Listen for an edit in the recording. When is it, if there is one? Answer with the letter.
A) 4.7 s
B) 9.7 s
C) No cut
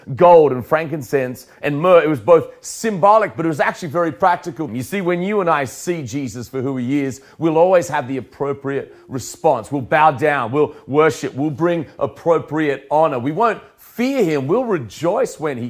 A